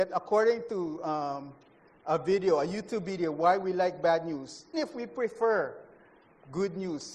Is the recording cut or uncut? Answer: cut